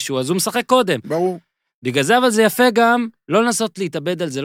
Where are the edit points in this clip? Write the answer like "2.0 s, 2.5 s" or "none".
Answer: none